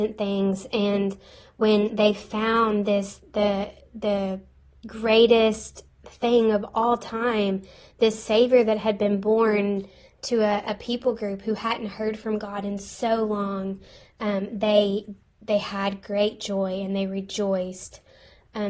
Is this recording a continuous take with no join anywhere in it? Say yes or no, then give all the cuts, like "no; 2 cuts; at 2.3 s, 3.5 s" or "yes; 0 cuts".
yes; 0 cuts